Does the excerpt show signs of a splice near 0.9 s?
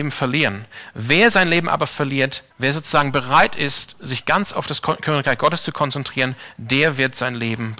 no; 1 cut; at 2.5 s

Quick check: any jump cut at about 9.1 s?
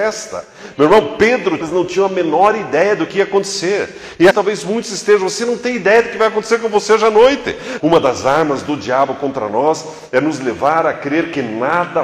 no; 3 cuts; at 1.6 s, 4.3 s, 7.8 s

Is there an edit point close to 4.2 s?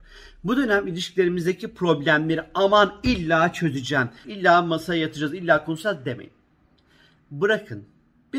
yes; 1 cut; at 4.2 s

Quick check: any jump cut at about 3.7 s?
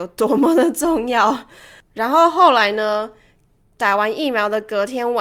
yes; 1 cut; at 3.7 s

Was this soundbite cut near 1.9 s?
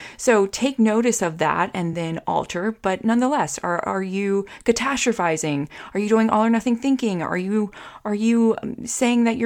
no; 0 cuts

